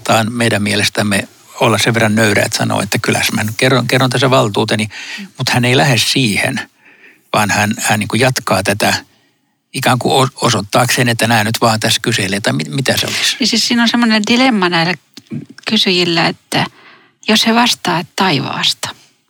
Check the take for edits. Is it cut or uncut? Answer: uncut